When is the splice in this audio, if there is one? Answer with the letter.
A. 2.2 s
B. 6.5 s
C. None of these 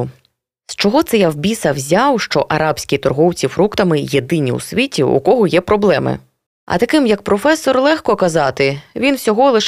B